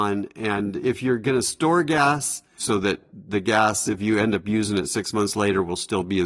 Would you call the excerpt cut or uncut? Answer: cut